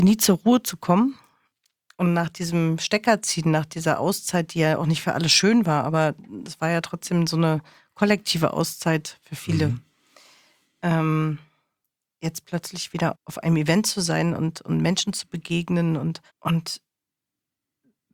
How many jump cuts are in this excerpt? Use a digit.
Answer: 2